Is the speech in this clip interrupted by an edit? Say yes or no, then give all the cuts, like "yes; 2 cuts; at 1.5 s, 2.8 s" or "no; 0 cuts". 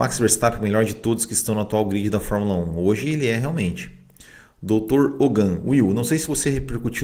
no; 0 cuts